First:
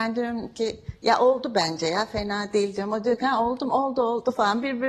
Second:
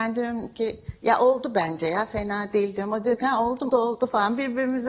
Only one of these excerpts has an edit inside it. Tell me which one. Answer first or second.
second